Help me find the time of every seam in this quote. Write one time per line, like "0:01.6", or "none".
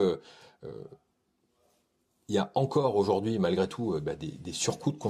none